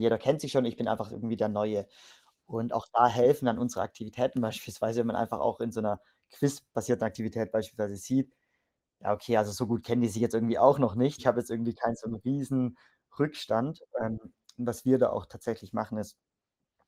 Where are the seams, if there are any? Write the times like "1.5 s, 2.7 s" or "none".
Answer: 11.2 s